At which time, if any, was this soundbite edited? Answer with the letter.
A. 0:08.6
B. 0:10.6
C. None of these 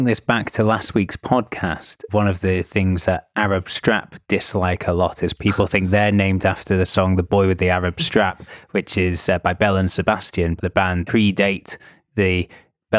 B